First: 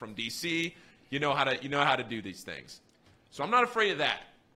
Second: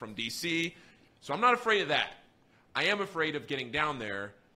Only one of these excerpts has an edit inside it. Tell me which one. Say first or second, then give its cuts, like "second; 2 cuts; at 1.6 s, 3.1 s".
second; 1 cut; at 1.1 s